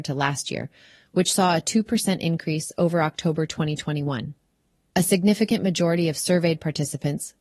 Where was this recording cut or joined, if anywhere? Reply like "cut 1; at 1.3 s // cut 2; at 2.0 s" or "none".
none

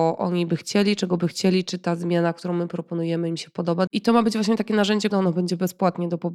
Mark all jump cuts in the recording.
cut 1; at 3.9 s // cut 2; at 5.1 s

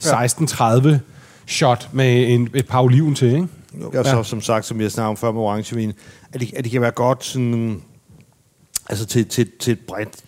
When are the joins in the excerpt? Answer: cut 1; at 3.9 s

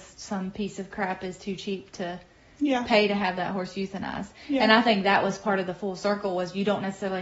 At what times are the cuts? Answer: none

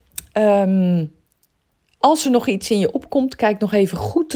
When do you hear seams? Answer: none

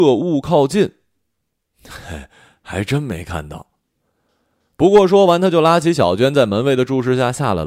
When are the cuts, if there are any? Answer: none

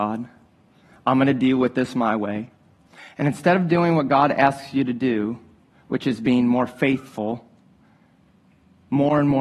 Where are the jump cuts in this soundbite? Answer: none

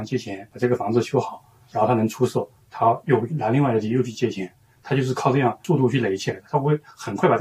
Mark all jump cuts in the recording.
none

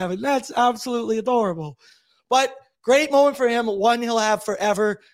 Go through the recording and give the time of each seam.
none

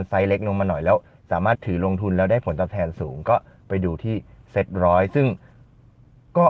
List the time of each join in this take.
cut 1; at 1.6 s

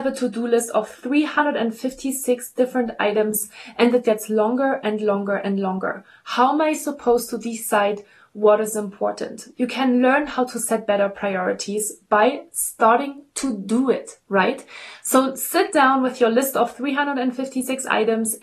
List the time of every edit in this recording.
cut 1; at 4.0 s // cut 2; at 9.5 s

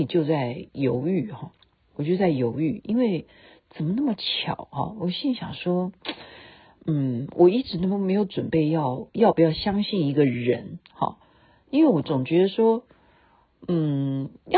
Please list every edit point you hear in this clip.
none

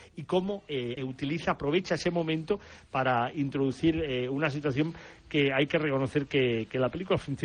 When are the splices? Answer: cut 1; at 1.0 s

